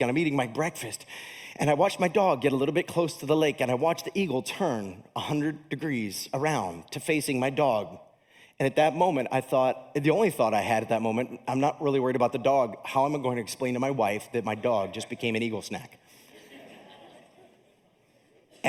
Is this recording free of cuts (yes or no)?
yes